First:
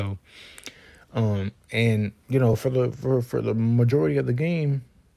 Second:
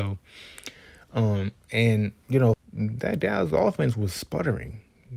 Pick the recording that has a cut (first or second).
second